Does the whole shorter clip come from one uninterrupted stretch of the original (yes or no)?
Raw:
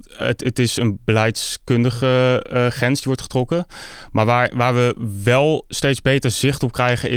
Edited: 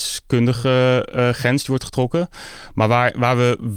yes